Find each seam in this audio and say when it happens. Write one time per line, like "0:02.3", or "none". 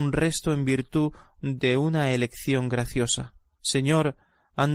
0:03.6